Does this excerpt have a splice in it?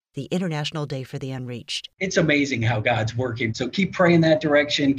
no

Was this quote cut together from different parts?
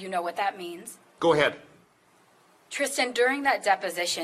yes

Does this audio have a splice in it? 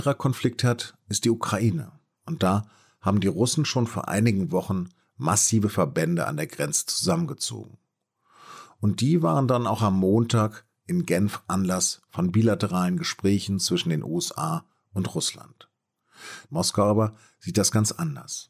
yes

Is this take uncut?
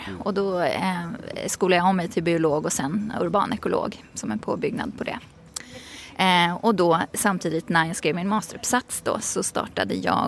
yes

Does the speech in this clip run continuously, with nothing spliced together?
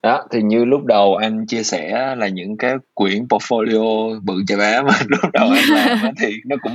yes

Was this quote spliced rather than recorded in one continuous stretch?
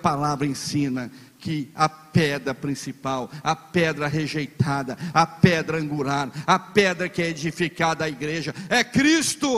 no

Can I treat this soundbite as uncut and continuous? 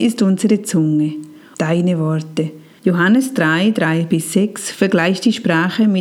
no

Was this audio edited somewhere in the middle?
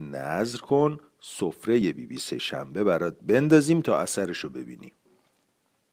no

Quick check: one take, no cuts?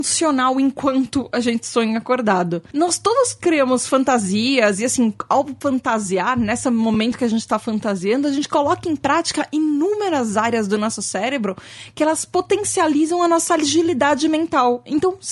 yes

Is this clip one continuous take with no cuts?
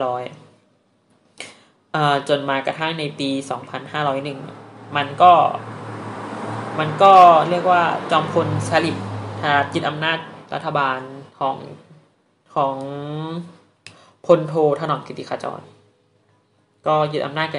no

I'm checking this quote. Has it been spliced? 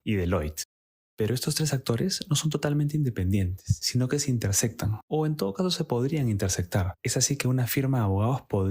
no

